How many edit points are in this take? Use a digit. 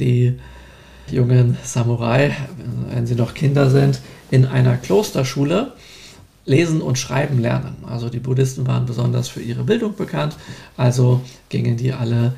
1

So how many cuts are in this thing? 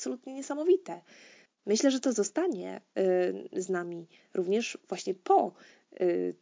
1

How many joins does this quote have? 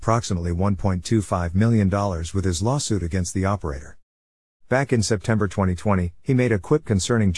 2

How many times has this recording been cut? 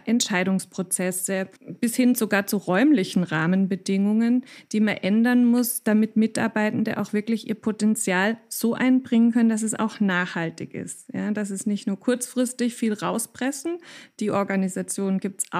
1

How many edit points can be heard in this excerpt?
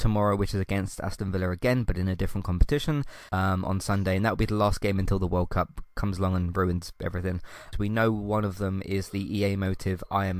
2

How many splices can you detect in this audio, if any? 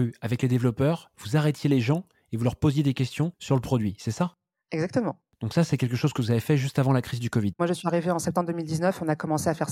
1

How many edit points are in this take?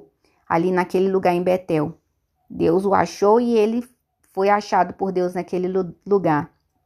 1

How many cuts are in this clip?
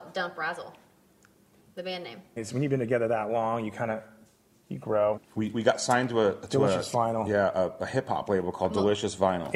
2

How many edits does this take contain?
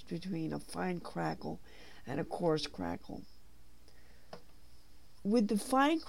1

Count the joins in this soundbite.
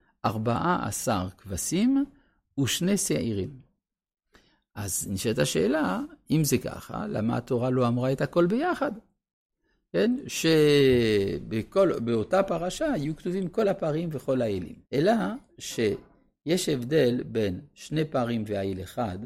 1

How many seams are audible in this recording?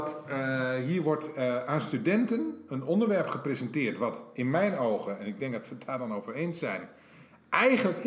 0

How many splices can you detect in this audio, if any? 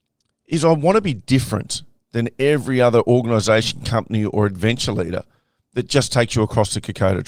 0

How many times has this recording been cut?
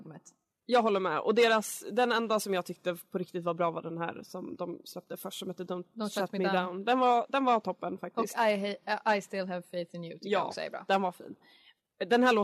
0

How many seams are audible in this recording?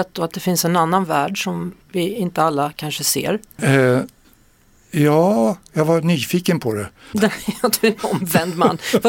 3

